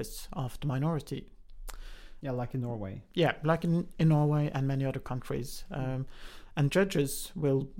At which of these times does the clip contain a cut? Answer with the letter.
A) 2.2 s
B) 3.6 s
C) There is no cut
A